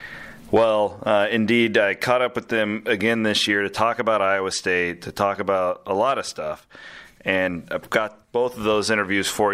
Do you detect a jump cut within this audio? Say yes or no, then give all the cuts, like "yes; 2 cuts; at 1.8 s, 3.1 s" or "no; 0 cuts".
no; 0 cuts